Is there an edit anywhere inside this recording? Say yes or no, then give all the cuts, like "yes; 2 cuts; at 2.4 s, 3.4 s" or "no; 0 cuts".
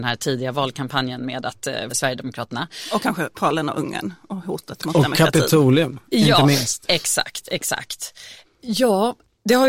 yes; 2 cuts; at 1.9 s, 8.4 s